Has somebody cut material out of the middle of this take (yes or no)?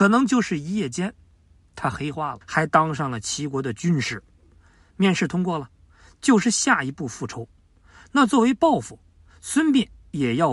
yes